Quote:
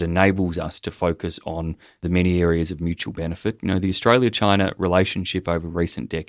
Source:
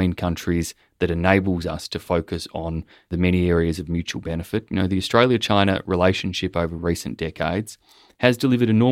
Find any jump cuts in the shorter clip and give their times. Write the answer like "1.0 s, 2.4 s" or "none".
none